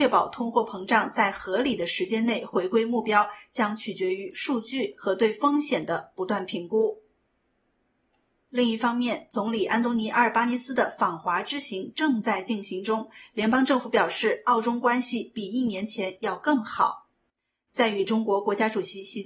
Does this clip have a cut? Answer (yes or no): no